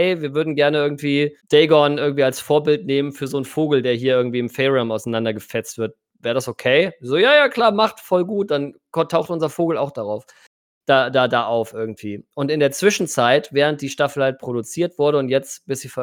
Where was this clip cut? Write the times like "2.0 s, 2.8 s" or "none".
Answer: 1.4 s